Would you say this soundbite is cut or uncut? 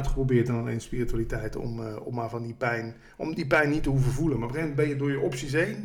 uncut